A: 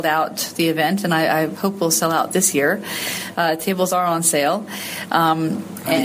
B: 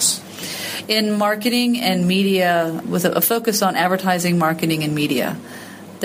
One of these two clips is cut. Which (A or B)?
B